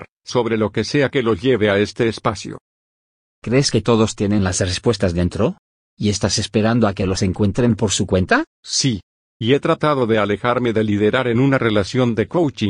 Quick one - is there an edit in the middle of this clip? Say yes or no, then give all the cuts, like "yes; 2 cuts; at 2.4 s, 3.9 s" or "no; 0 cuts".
yes; 1 cut; at 8.5 s